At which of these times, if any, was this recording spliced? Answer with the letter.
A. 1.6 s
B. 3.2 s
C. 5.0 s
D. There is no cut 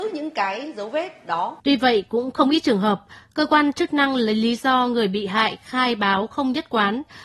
A